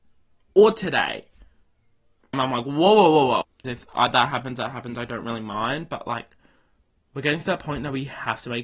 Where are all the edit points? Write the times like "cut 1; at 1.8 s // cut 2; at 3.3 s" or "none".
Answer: cut 1; at 2.3 s // cut 2; at 3.6 s